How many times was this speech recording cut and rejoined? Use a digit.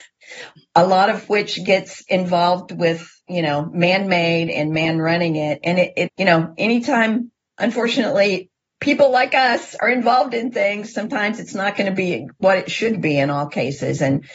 1